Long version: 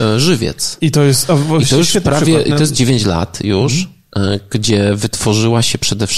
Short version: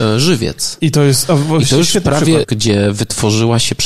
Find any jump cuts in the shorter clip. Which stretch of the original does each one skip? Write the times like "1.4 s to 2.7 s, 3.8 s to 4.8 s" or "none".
2.4 s to 4.5 s